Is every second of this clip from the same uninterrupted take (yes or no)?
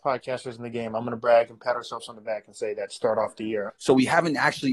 no